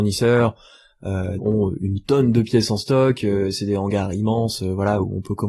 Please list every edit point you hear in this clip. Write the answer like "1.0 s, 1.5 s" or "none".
1.4 s